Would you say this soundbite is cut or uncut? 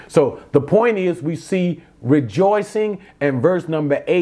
uncut